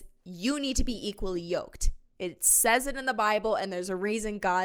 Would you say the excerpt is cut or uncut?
uncut